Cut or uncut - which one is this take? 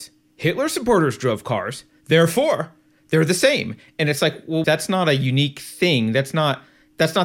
cut